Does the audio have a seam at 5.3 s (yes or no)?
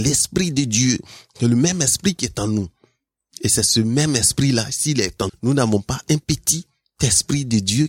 yes